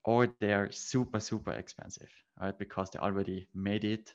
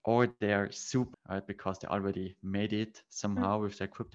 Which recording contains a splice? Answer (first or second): second